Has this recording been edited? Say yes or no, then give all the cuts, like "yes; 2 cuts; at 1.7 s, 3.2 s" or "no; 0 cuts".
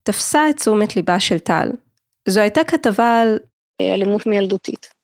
no; 0 cuts